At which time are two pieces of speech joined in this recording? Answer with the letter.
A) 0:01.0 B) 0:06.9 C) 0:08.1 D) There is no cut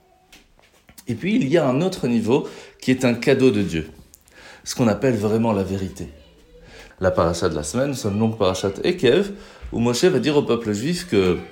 B